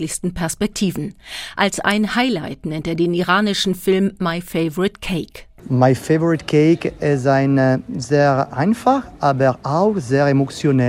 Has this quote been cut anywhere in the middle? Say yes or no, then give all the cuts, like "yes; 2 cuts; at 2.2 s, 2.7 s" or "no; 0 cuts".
no; 0 cuts